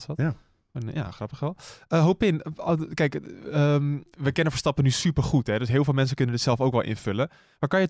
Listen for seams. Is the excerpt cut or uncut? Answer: cut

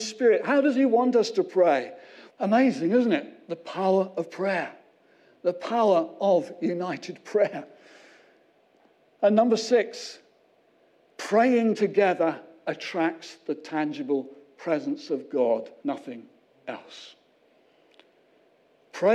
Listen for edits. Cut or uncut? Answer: cut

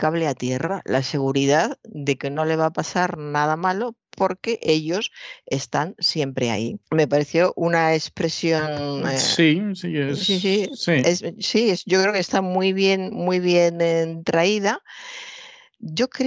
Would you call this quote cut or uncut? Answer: cut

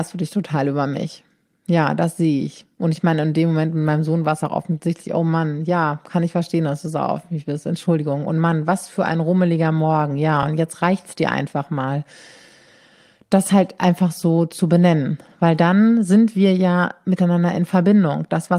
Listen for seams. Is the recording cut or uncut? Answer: uncut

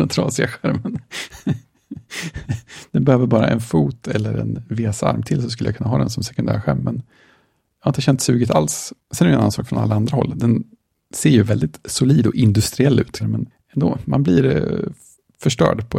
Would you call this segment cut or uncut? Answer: cut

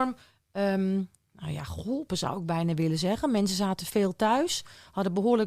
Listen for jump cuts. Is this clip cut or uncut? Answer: uncut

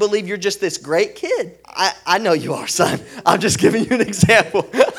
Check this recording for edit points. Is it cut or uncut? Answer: cut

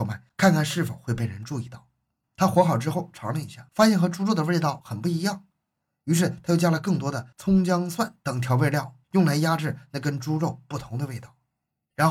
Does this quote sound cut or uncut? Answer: cut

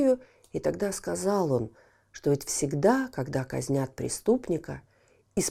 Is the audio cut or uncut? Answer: uncut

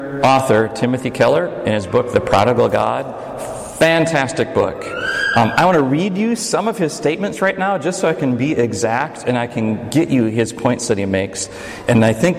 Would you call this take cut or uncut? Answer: uncut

